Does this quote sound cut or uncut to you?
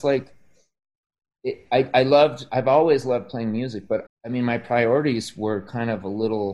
cut